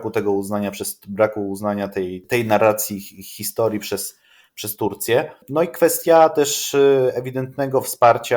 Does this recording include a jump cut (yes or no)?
no